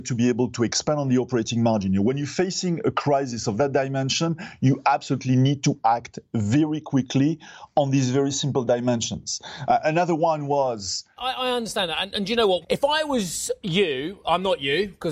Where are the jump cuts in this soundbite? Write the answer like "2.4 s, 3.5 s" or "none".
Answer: 11.2 s, 12.6 s